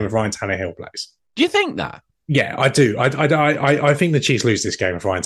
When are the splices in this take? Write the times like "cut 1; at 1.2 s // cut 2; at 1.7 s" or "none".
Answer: none